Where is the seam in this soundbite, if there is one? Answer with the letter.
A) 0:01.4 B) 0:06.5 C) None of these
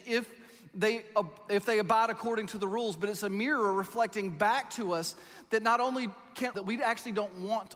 B